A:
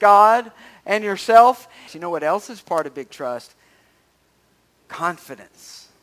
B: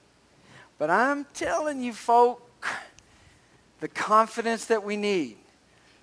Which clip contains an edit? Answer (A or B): A